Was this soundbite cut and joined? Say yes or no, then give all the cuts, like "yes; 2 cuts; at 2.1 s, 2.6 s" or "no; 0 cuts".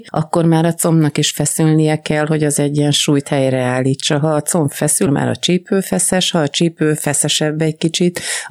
yes; 1 cut; at 5.1 s